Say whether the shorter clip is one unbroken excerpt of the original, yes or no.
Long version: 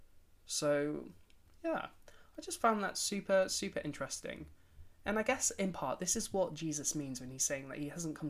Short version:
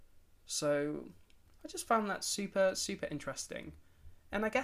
no